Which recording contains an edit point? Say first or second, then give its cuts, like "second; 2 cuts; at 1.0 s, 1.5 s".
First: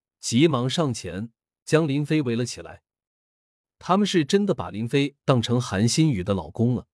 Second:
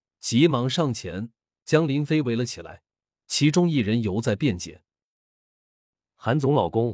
first; 1 cut; at 3.1 s